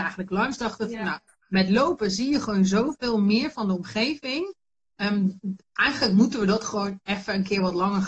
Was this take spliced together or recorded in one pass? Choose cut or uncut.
uncut